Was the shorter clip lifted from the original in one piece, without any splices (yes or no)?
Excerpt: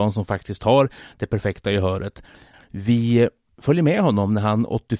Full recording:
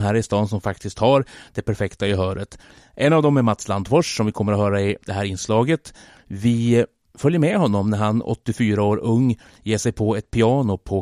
no